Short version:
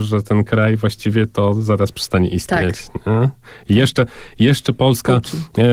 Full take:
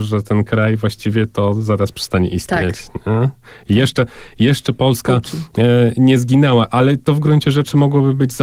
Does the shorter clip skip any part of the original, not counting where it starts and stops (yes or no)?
no